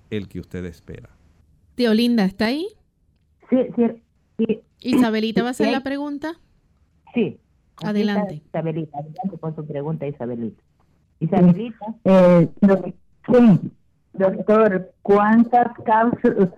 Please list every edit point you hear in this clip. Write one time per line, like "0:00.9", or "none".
none